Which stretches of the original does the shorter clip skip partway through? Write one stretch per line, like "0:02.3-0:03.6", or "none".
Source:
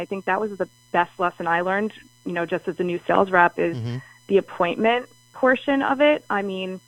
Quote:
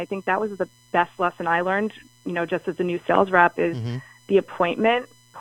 none